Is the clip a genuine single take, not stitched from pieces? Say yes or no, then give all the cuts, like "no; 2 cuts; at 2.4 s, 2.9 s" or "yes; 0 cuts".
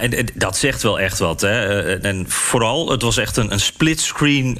yes; 0 cuts